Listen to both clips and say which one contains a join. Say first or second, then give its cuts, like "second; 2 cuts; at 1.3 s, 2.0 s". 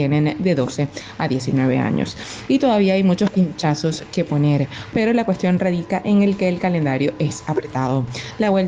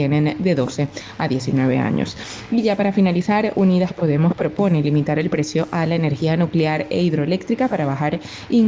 first; 2 cuts; at 2.5 s, 4.9 s